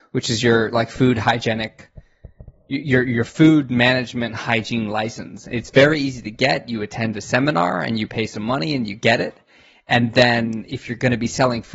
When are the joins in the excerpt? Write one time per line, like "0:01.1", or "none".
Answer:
none